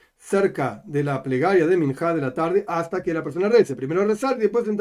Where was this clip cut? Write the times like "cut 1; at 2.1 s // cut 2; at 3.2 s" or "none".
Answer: none